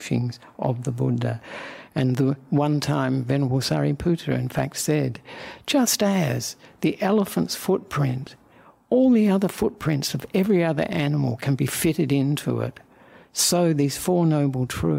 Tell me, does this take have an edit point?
no; 0 cuts

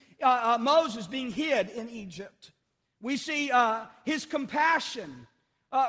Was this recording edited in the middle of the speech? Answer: no; 0 cuts

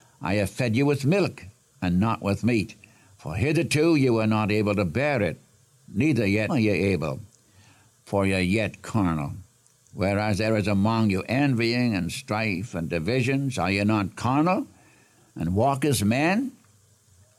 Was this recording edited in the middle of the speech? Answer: yes; 1 cut; at 6.5 s

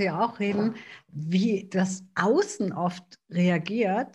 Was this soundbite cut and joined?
no; 0 cuts

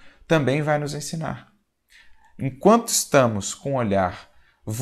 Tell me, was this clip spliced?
no; 0 cuts

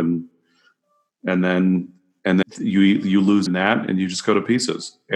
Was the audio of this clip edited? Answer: yes; 2 cuts; at 2.4 s, 3.5 s

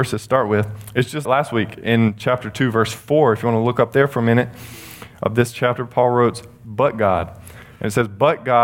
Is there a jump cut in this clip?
yes; 1 cut; at 1.2 s

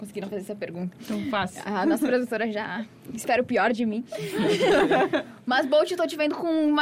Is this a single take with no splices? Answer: yes; 0 cuts

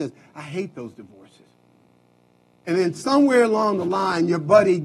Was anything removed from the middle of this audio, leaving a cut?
yes; 1 cut; at 2.6 s

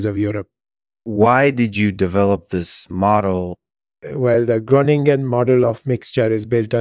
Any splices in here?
no; 0 cuts

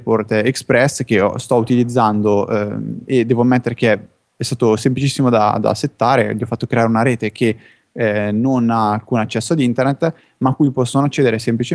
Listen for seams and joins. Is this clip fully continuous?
yes; 0 cuts

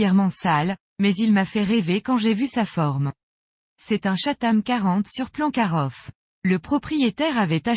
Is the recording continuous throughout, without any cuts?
yes; 0 cuts

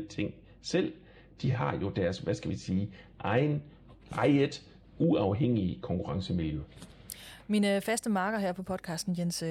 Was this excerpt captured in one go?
yes; 0 cuts

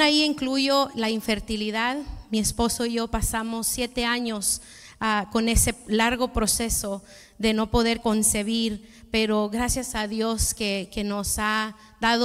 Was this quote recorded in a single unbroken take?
yes; 0 cuts

